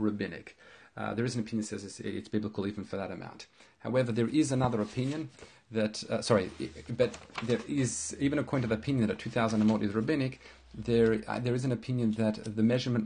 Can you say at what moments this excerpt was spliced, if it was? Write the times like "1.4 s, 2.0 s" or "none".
none